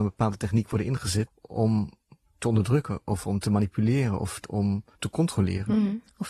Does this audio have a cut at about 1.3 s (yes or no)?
yes